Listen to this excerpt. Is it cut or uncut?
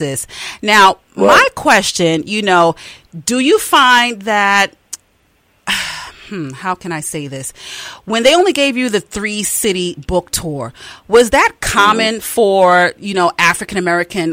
uncut